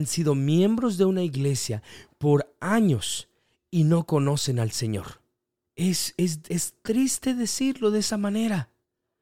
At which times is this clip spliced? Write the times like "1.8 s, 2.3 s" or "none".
5.6 s